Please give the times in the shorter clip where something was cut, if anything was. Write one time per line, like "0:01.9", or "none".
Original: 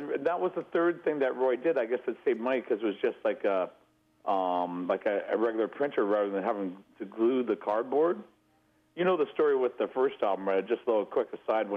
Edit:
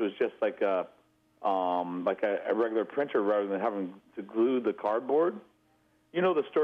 none